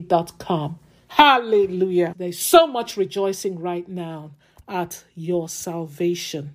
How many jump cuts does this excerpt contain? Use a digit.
1